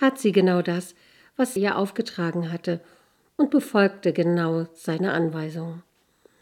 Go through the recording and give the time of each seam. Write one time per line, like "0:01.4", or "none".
0:01.6